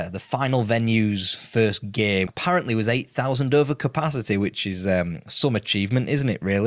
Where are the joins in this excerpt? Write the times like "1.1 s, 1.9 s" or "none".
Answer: 2.3 s

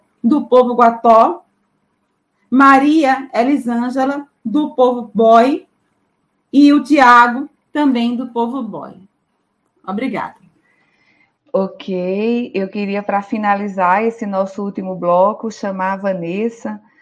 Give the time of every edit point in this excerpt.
none

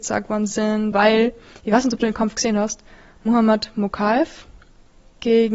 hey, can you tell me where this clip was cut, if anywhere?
0.9 s

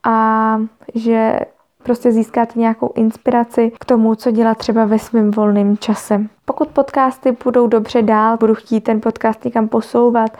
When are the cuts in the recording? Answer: 6.4 s, 8.4 s

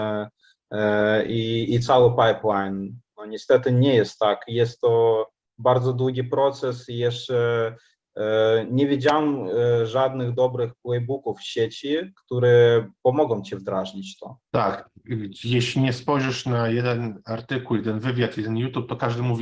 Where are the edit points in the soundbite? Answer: 14.5 s, 18.3 s

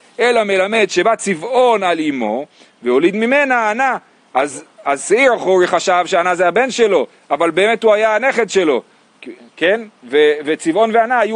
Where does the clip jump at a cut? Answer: none

